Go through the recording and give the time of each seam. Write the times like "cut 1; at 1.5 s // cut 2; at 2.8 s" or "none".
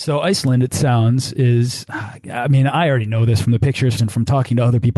cut 1; at 4.0 s